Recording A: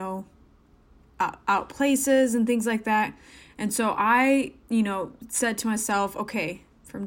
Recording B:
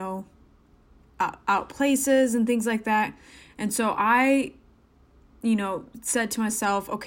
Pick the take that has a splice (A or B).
A